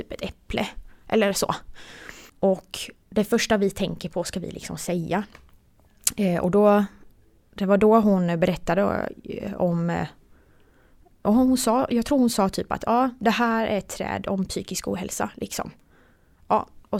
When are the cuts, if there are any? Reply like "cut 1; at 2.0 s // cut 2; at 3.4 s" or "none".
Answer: cut 1; at 2.3 s

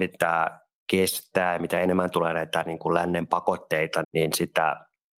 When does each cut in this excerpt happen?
cut 1; at 4.0 s

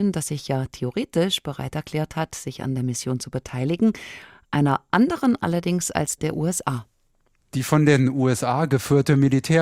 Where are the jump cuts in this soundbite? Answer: cut 1; at 6.2 s

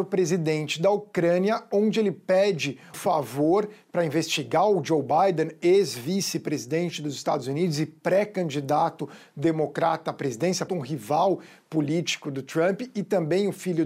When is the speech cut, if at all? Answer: cut 1; at 2.9 s // cut 2; at 10.7 s

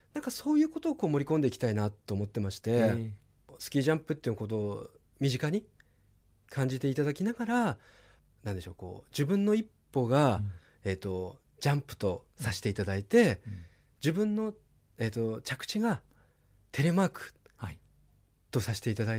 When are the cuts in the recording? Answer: none

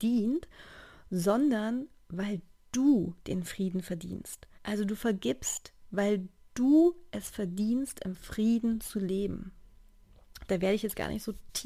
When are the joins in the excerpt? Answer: cut 1; at 4.5 s // cut 2; at 10.5 s

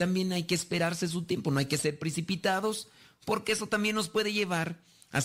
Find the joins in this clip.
none

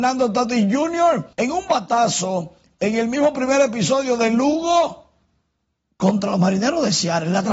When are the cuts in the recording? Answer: cut 1; at 1.3 s

